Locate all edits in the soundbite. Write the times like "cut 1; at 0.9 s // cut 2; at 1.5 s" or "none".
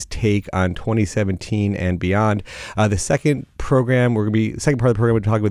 none